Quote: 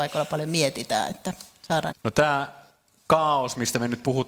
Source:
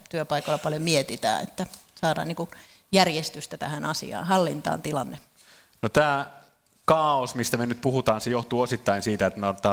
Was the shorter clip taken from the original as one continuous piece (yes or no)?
no